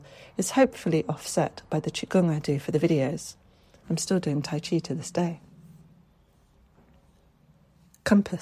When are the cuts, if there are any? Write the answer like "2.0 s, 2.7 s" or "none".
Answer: 3.8 s